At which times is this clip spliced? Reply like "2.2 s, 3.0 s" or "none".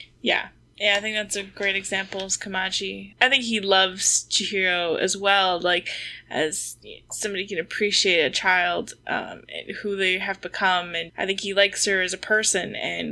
3.1 s, 11.1 s